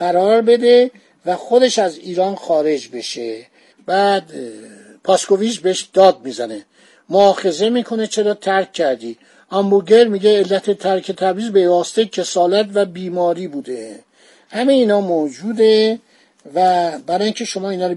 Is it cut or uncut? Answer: uncut